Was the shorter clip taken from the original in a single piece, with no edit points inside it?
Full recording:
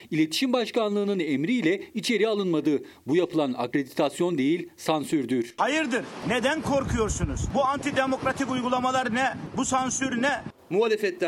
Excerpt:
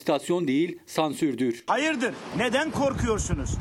yes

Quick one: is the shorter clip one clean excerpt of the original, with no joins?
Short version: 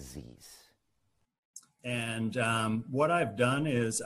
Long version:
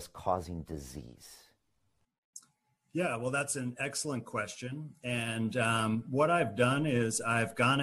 no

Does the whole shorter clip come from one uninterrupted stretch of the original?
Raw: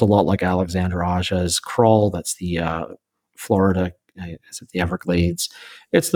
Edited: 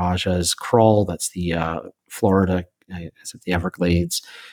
no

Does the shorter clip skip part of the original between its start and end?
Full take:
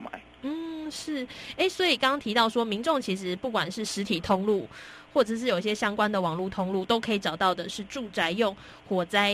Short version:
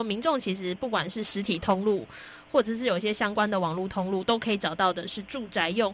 no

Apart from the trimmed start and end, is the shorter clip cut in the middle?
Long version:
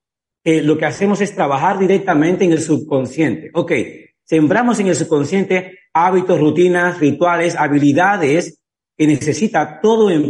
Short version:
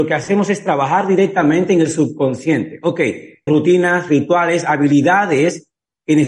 yes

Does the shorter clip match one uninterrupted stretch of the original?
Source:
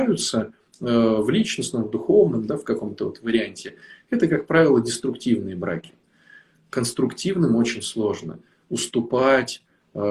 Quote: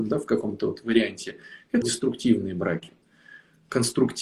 no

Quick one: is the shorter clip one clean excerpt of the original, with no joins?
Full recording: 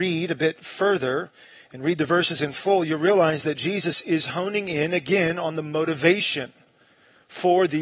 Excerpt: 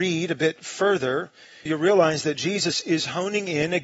no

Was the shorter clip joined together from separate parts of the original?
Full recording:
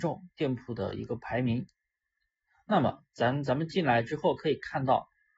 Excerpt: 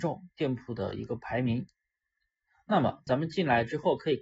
yes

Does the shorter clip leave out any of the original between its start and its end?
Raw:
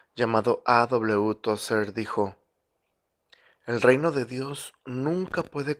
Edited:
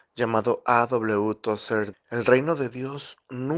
yes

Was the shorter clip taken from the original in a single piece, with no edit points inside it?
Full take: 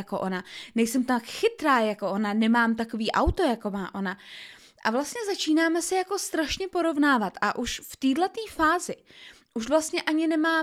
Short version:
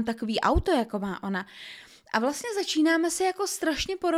yes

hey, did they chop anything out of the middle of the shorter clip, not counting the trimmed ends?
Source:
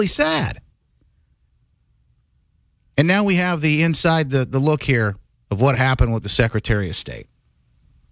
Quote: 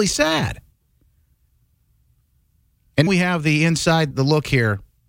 yes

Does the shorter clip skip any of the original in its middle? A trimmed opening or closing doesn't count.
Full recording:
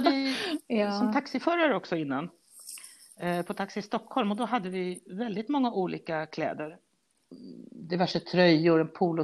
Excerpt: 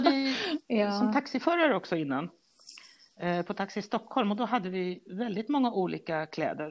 no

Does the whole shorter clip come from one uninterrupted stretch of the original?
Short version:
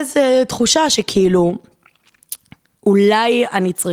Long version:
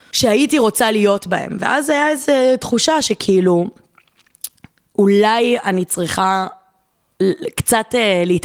yes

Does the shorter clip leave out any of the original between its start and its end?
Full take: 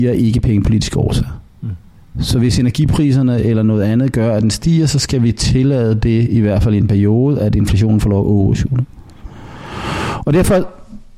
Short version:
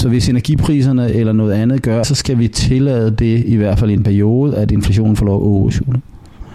yes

